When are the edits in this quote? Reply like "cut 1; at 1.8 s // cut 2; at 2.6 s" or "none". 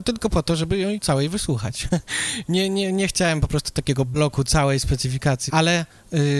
cut 1; at 5.5 s